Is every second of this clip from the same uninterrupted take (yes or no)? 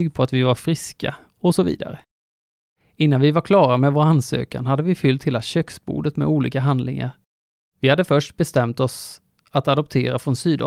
yes